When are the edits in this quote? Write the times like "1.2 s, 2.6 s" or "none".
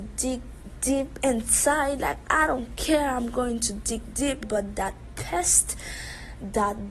4.4 s